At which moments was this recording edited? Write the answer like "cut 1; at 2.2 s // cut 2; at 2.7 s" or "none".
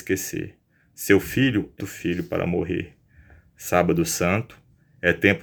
cut 1; at 1.8 s